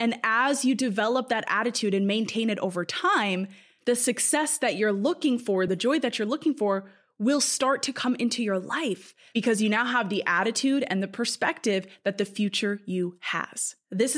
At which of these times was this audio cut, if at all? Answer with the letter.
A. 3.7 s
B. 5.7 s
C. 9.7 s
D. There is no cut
B